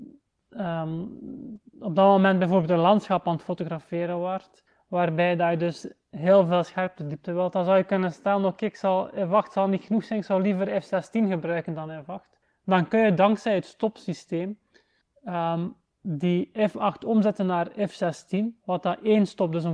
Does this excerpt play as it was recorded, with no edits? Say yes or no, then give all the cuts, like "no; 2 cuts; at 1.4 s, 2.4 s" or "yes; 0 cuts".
yes; 0 cuts